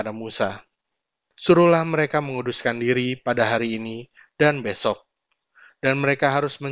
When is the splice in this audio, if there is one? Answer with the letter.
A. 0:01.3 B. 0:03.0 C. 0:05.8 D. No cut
A